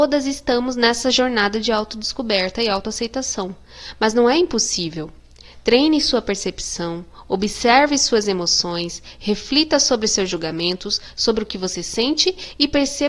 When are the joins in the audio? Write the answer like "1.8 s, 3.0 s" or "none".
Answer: none